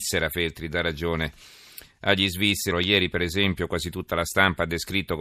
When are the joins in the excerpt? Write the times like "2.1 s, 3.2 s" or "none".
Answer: 2.7 s